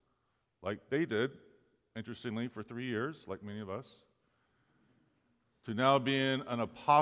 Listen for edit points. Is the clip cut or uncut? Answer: uncut